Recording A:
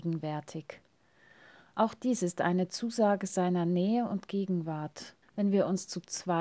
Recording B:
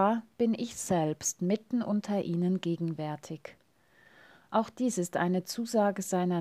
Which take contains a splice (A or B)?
A